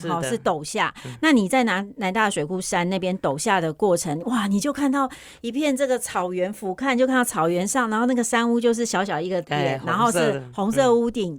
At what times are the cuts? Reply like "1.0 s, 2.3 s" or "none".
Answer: none